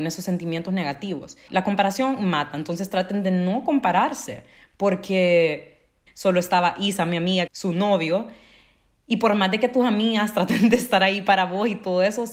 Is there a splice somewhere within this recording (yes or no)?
yes